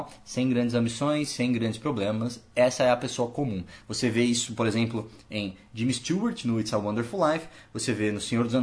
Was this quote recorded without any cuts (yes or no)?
yes